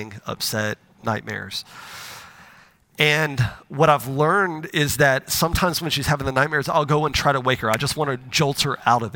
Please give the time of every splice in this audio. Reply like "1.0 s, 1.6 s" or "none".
none